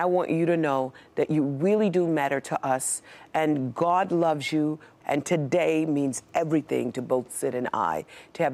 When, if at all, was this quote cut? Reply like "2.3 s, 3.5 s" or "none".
5.0 s